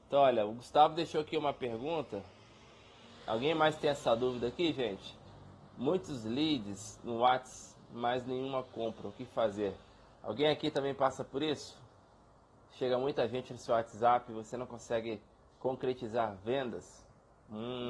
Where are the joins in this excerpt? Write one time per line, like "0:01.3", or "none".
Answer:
none